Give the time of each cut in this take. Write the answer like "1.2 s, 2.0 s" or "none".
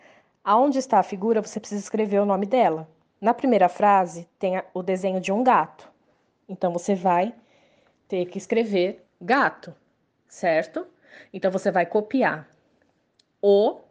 3.1 s